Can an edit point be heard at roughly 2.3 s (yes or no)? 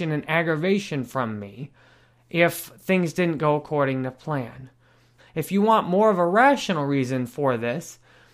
no